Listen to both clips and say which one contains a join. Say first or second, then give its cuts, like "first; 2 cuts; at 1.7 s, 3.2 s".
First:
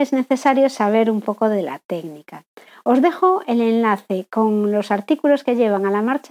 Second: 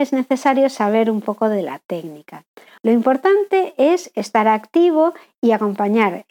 second; 1 cut; at 2.8 s